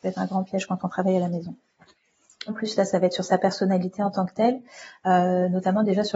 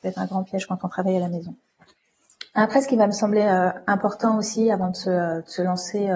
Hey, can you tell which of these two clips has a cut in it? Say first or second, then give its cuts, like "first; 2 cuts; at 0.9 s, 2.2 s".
first; 1 cut; at 2.5 s